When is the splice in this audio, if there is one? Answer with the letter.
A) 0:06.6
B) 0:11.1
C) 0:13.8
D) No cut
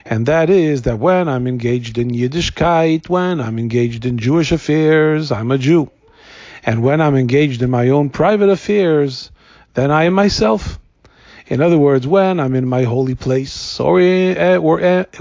D